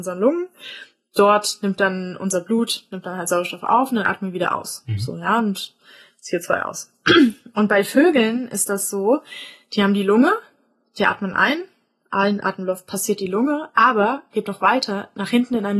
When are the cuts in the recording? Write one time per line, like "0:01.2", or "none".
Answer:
none